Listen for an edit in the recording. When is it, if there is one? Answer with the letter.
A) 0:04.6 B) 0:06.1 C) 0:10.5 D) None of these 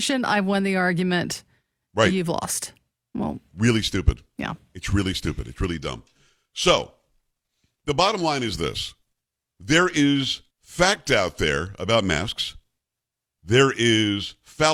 C